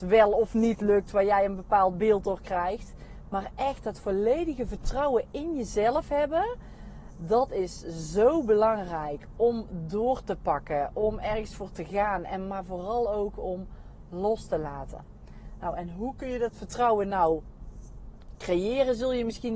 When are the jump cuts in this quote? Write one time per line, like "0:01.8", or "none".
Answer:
none